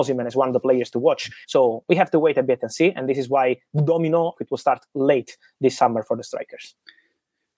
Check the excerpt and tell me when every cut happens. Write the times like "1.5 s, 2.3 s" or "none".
1.4 s, 4.3 s